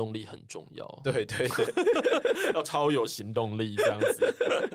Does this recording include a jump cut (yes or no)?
no